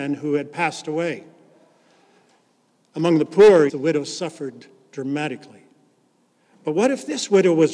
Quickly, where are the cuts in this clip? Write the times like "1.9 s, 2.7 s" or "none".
3.7 s